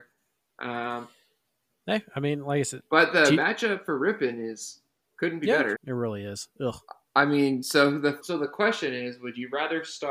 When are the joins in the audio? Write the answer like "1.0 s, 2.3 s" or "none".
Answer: 5.8 s, 8.2 s